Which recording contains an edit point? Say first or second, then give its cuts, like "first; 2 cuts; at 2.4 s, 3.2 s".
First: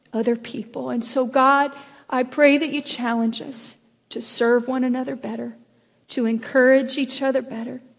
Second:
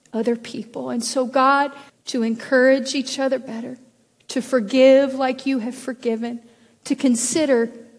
second; 1 cut; at 1.9 s